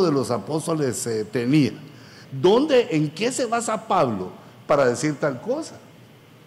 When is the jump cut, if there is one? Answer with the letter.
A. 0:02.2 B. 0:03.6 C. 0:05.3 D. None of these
A